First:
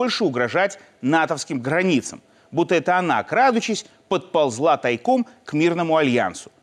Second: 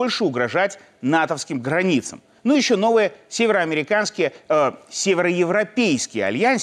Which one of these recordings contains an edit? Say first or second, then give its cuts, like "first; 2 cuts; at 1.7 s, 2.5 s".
second; 1 cut; at 2.4 s